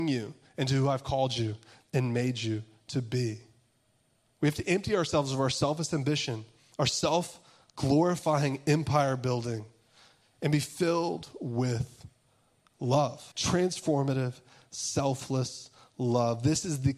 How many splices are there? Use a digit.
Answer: 1